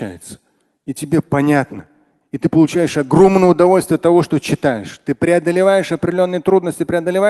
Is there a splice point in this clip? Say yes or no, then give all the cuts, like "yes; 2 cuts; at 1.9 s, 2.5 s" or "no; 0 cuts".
no; 0 cuts